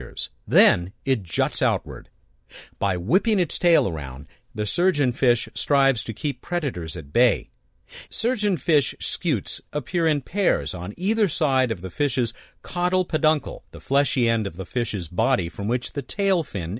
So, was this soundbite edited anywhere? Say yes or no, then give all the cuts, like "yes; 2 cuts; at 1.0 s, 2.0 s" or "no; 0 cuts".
yes; 2 cuts; at 8.1 s, 13.7 s